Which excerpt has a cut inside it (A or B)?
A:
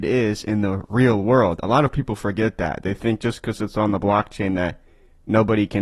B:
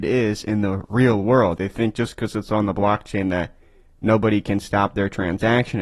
B